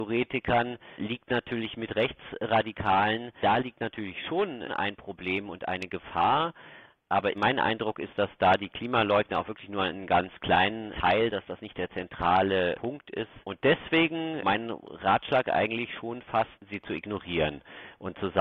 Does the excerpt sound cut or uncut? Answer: uncut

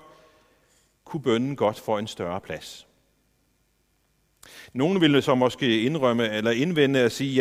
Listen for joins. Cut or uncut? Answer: uncut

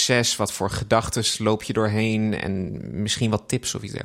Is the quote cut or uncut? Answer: uncut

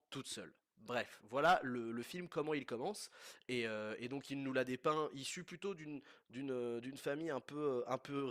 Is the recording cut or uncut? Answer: uncut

